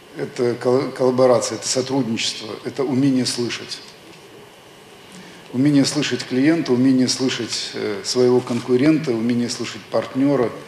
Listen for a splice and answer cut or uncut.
uncut